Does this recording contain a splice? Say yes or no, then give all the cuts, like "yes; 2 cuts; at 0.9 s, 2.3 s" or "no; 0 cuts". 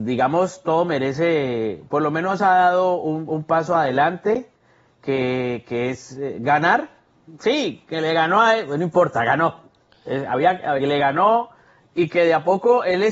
yes; 1 cut; at 10.8 s